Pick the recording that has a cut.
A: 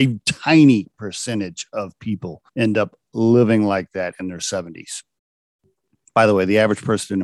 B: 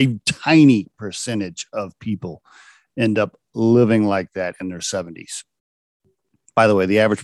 A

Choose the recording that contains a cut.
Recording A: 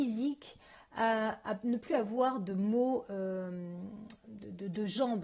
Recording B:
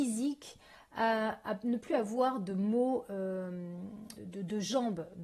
B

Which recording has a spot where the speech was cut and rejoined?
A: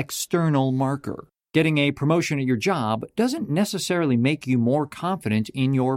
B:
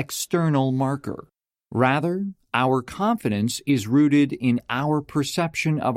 A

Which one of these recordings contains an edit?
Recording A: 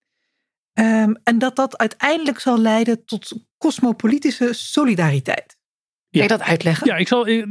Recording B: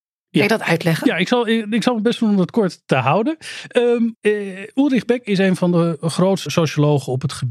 B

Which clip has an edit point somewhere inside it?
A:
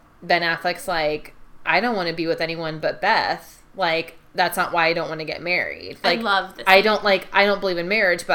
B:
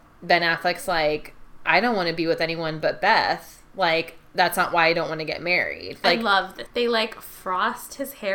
B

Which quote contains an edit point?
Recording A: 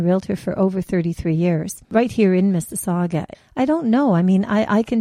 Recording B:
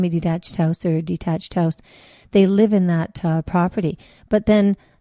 A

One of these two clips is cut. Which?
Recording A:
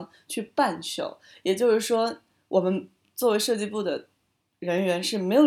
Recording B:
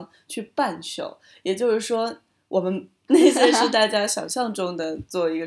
B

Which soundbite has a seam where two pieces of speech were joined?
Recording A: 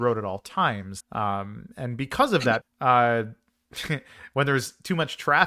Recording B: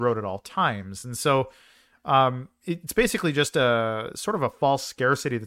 A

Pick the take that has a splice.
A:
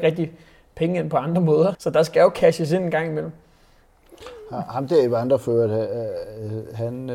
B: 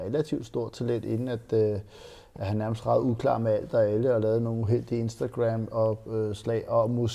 A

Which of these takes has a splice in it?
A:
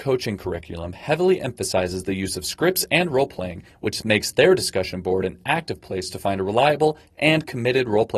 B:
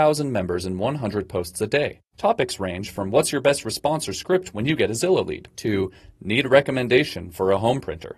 B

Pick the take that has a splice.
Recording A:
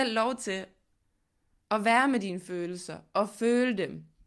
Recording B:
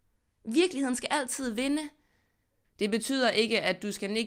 B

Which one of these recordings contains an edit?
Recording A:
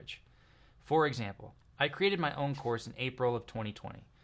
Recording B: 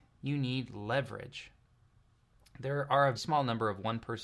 B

